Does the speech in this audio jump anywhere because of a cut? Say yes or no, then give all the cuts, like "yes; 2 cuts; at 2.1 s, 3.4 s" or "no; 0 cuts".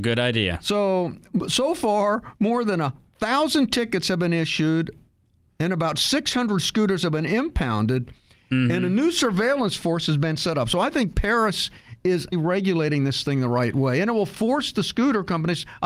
yes; 1 cut; at 12.3 s